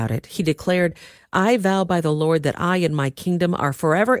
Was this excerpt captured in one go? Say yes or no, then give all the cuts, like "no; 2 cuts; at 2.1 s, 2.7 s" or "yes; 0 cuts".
yes; 0 cuts